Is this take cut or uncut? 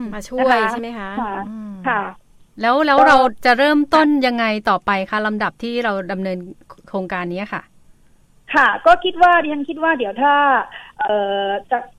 uncut